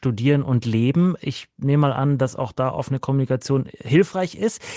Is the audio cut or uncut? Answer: uncut